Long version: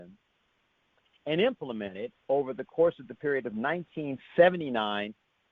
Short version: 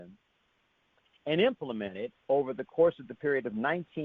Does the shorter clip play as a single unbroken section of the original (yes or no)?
yes